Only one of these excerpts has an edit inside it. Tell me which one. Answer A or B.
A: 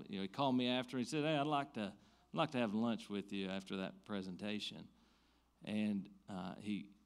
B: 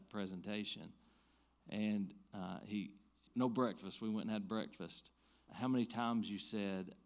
B